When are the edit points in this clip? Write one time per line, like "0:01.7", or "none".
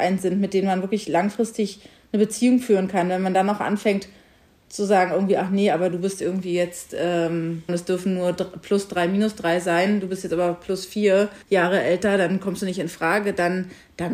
0:07.7
0:11.4

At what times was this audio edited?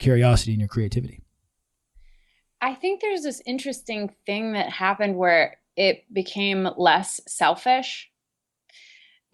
none

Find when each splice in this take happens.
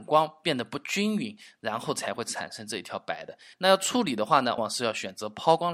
0:03.5
0:04.6

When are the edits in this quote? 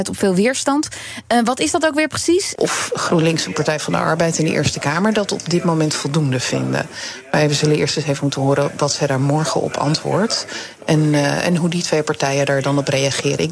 0:02.6

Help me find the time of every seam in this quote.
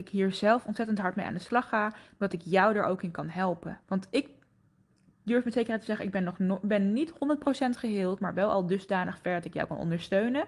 0:03.8

